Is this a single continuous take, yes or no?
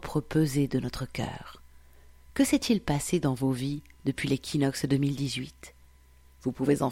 yes